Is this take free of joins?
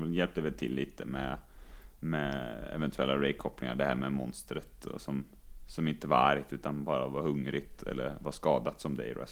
yes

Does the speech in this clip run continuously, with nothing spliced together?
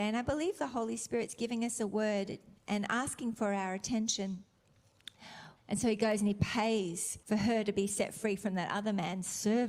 no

